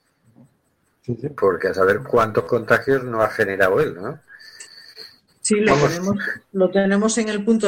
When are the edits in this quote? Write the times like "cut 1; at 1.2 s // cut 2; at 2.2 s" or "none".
cut 1; at 5.3 s